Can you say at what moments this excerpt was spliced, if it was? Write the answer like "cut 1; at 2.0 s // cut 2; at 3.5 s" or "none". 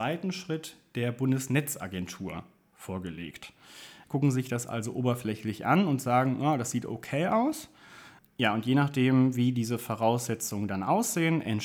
cut 1; at 4.0 s // cut 2; at 8.2 s